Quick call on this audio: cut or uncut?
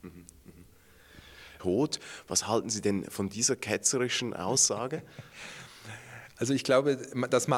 cut